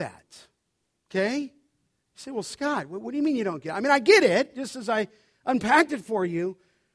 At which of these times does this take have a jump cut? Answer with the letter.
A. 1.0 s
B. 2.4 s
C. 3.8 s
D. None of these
D